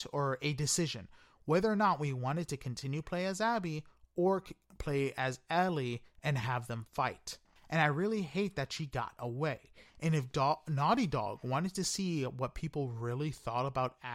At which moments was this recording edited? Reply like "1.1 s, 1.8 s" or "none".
7.6 s